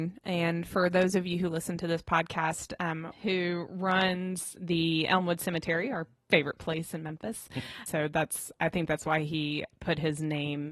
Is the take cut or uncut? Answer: cut